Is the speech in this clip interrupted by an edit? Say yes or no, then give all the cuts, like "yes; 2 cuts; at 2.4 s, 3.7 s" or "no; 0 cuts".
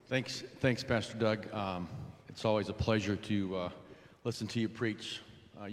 no; 0 cuts